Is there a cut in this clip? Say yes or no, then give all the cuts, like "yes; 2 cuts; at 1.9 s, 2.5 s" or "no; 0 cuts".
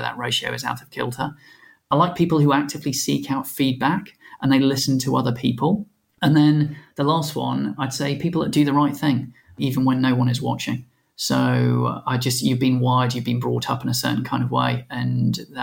no; 0 cuts